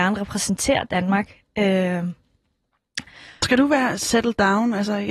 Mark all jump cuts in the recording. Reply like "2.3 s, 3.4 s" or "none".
none